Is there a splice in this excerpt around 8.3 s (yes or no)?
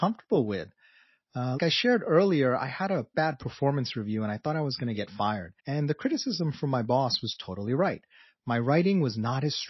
no